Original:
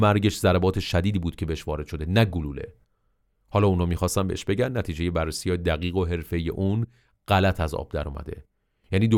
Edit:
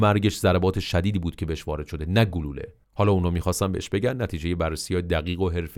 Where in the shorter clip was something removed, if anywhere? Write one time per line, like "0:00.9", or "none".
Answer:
0:02.8